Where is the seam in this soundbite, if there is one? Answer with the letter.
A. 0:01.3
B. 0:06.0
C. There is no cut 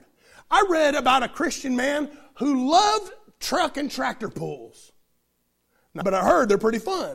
B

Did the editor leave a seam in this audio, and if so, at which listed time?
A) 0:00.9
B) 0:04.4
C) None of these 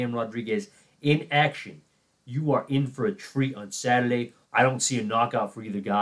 B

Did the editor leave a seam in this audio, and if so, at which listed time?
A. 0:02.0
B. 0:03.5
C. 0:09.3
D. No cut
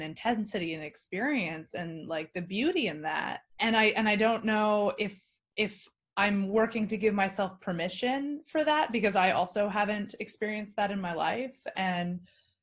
B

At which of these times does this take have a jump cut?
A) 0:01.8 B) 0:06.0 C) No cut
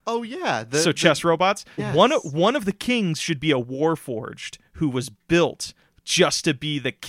A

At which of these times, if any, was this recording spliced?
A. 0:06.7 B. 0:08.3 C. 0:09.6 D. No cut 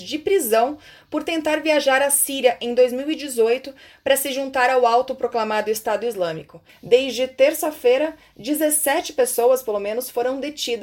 A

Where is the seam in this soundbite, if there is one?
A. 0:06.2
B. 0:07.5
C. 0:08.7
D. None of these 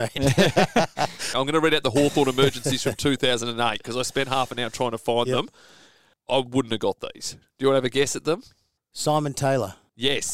D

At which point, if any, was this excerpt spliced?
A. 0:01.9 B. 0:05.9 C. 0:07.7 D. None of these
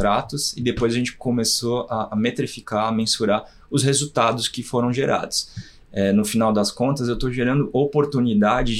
B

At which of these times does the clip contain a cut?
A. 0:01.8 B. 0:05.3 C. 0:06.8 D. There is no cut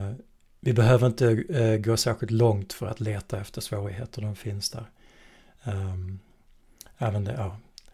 D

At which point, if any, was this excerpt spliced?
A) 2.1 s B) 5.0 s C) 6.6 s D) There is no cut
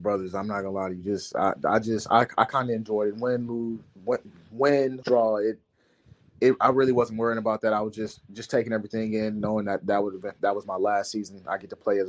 B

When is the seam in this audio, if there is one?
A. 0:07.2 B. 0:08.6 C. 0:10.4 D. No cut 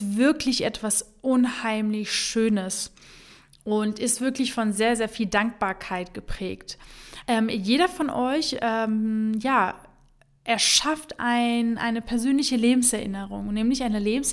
A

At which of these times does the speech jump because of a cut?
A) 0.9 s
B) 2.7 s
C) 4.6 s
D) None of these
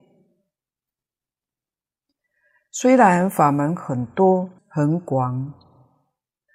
C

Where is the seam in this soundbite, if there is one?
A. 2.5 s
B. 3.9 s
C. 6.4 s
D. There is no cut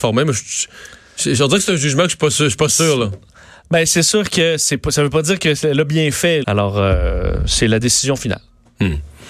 C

